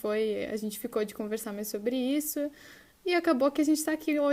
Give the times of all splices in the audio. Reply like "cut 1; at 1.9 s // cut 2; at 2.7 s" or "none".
none